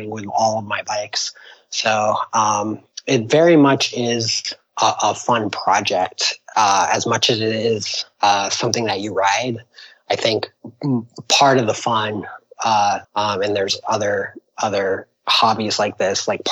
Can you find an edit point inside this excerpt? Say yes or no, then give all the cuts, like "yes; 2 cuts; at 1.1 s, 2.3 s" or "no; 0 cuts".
yes; 1 cut; at 13.0 s